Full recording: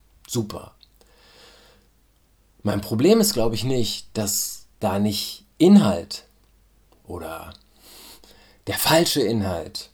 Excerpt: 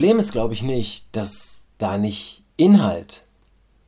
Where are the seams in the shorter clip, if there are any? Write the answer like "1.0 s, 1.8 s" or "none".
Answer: none